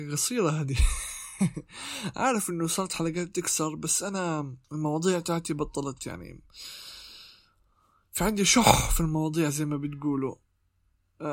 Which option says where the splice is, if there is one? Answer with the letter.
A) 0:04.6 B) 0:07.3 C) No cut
A